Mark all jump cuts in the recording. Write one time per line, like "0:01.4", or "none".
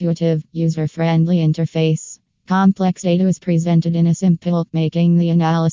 0:04.7